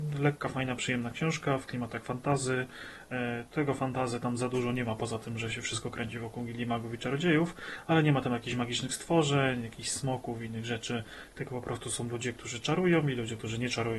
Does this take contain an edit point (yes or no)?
no